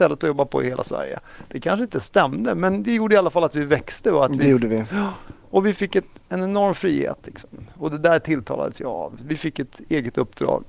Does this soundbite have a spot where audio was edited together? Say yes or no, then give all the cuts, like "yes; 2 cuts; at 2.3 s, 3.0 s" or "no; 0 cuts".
no; 0 cuts